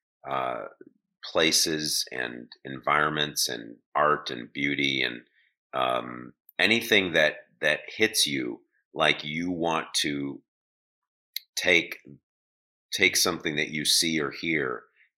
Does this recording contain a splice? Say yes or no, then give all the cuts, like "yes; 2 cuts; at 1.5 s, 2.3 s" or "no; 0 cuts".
yes; 1 cut; at 3.8 s